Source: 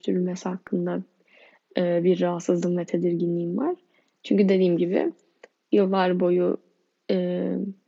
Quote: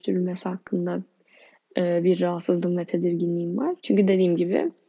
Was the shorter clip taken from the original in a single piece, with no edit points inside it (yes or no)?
no